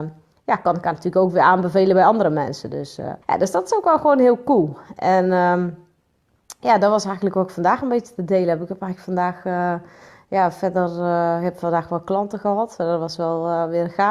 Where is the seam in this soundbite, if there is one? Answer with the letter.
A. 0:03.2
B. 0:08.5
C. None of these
A